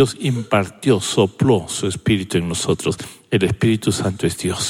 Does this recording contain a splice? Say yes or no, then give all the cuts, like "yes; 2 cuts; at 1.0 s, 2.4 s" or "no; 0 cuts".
no; 0 cuts